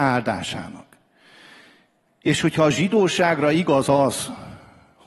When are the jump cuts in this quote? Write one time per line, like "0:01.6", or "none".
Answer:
none